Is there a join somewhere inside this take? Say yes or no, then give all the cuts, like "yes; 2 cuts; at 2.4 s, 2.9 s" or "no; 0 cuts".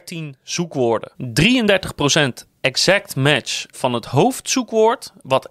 yes; 2 cuts; at 1.1 s, 3.7 s